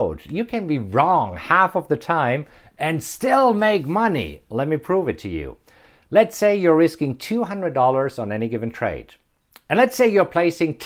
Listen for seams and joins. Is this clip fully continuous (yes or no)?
yes